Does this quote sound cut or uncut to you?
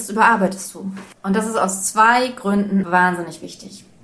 cut